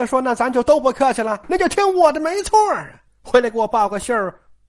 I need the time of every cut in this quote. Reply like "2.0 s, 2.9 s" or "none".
1.4 s, 3.1 s

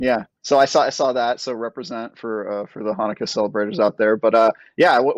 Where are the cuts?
none

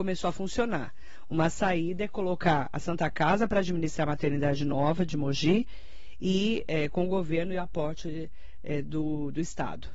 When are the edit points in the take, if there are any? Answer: none

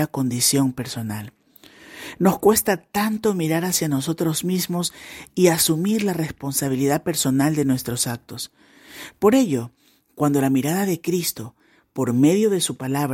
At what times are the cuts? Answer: none

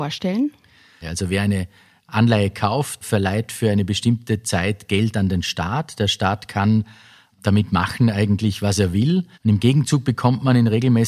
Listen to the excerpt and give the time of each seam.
1.0 s, 9.3 s

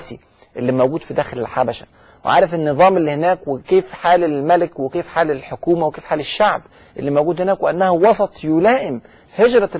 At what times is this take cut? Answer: none

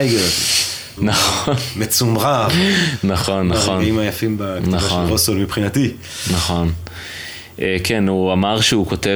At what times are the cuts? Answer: 1.0 s

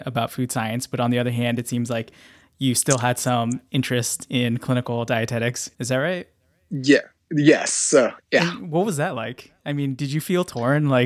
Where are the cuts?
5.8 s

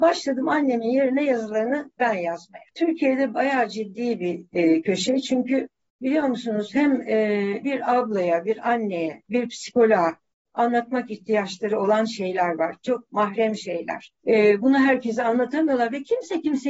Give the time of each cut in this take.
7.6 s, 14.2 s

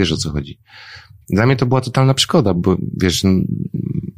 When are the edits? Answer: 1.2 s, 2.5 s

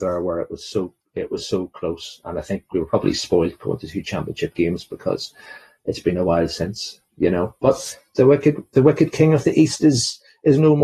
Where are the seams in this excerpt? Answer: none

